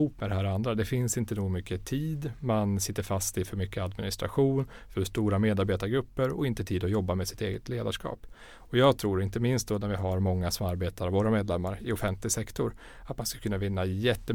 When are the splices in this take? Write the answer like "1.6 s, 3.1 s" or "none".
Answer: none

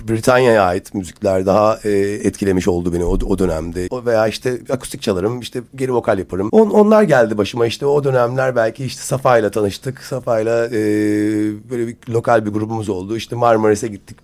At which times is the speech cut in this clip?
3.9 s, 6.5 s

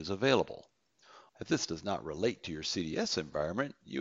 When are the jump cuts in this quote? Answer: 1.3 s

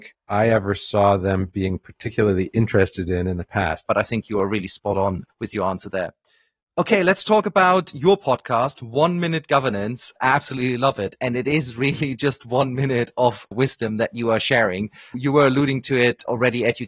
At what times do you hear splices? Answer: 3.9 s

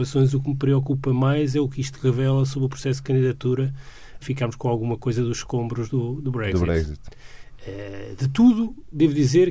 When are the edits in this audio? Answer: 4.2 s

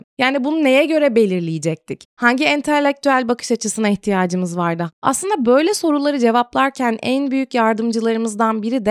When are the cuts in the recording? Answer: 4.9 s

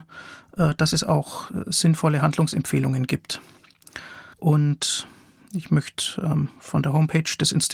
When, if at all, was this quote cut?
4.3 s

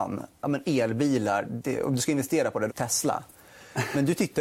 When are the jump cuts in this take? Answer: 1.4 s, 2.7 s

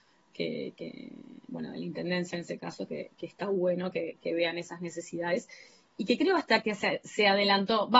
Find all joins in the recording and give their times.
none

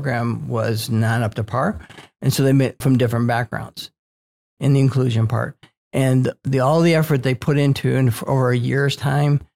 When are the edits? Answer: 2.8 s, 4.6 s

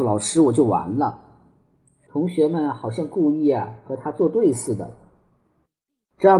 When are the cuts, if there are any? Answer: 2.1 s

